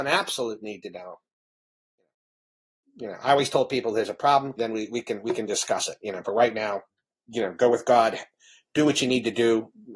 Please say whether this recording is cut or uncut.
cut